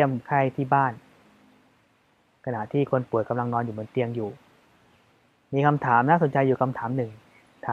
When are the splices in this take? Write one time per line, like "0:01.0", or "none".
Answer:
none